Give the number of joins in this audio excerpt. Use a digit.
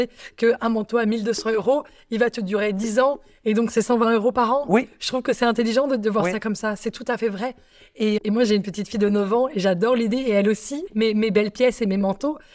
2